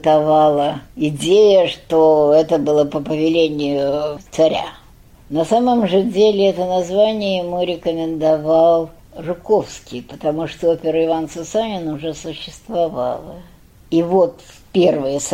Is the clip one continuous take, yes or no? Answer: yes